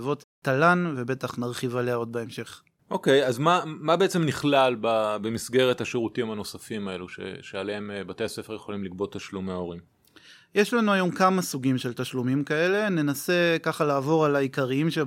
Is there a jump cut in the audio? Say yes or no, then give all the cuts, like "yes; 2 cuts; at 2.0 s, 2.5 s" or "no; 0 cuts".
no; 0 cuts